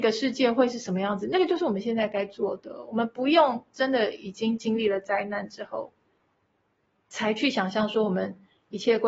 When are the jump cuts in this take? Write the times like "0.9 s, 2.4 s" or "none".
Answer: none